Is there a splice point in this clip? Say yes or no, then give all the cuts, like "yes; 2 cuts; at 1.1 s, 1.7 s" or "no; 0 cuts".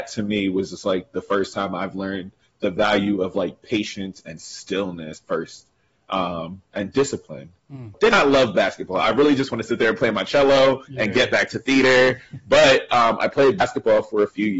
yes; 1 cut; at 7.9 s